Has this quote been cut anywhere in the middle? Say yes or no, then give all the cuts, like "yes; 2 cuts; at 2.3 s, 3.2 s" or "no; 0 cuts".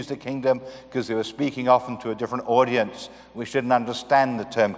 no; 0 cuts